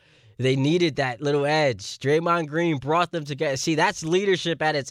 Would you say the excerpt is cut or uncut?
uncut